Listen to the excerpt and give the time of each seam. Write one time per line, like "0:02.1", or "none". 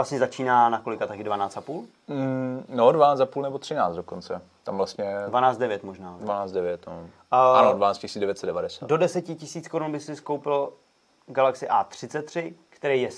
none